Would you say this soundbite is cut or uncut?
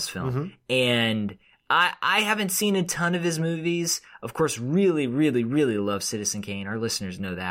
uncut